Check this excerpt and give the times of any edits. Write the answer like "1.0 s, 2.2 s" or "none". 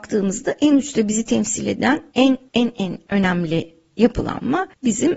none